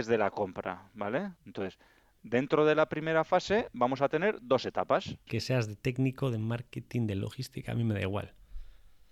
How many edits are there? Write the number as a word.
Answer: two